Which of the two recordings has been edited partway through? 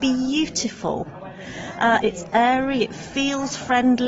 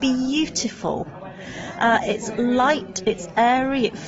first; 1 cut; at 2.0 s

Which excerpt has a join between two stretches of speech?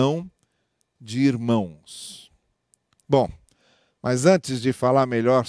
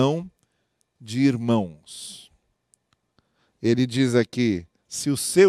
first; 1 cut; at 3.0 s

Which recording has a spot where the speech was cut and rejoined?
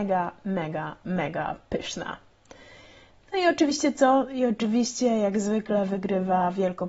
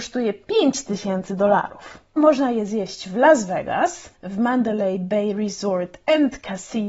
second; 2 cuts; at 2.2 s, 4.1 s

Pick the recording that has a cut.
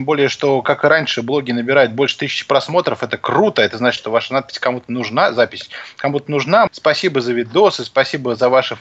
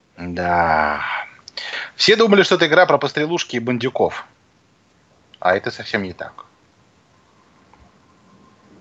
first; 2 cuts; at 4.0 s, 6.7 s

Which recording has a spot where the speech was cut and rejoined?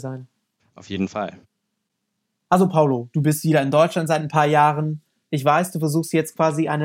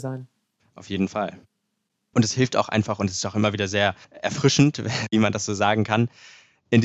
second; 2 cuts; at 2.1 s, 4.0 s

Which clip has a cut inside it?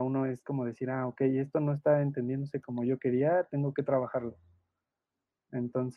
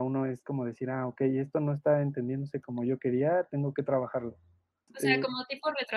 second; 1 cut; at 4.9 s

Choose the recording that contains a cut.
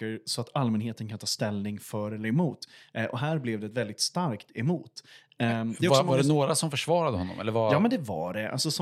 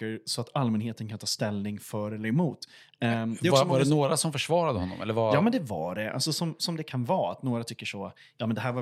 second; 1 cut; at 2.9 s

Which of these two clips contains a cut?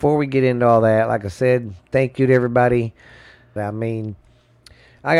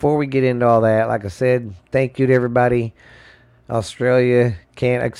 first; 1 cut; at 3.6 s

